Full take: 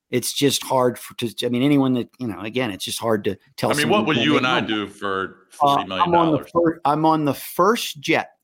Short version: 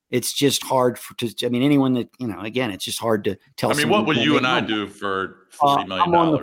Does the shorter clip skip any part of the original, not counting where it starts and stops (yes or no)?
no